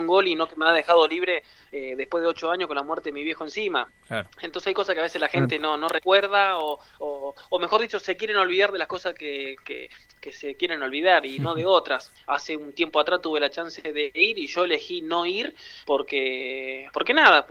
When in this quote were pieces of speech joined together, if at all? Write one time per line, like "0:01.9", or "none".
0:12.2

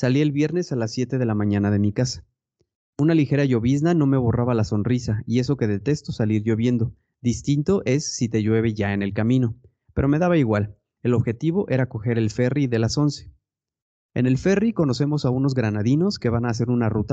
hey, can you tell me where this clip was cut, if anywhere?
0:11.0
0:14.0

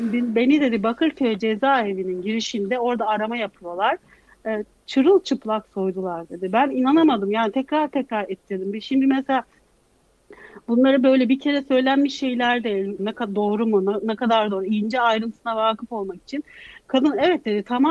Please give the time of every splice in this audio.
0:13.0

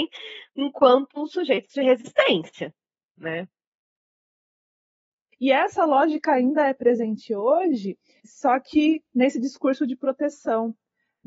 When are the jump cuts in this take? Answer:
0:05.3
0:08.2

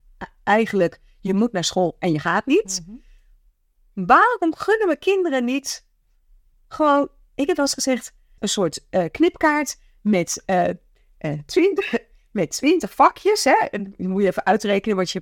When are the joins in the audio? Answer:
0:08.4

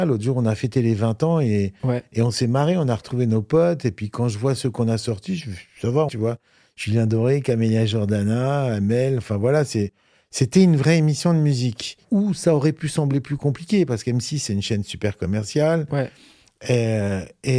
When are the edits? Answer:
0:06.1

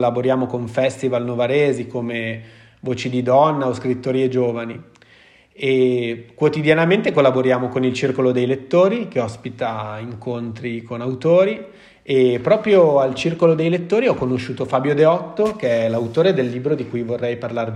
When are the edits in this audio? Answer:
none

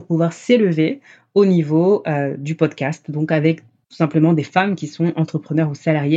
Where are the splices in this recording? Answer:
none

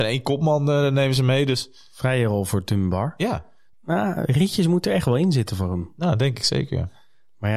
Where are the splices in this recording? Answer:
0:03.7

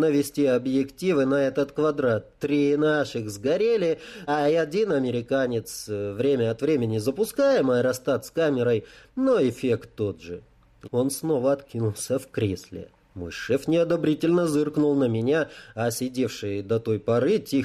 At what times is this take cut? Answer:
0:04.3
0:10.8
0:13.0

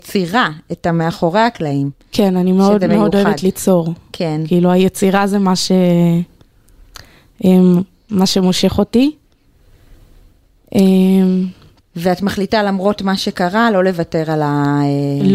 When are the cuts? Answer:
none

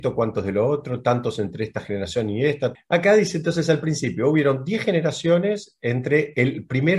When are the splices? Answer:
0:02.8

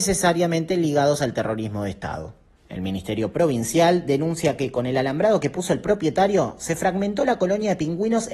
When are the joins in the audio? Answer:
0:02.6

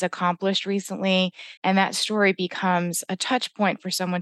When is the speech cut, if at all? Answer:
0:01.6

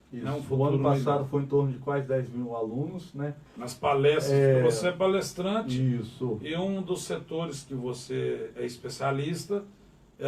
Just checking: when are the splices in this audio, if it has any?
0:03.5

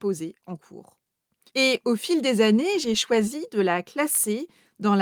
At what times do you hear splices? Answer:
0:01.5

